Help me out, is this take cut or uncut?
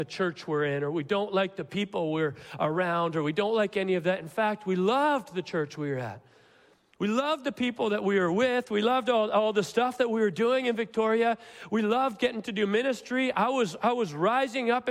uncut